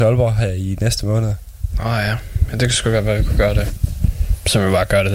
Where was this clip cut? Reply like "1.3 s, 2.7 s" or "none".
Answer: none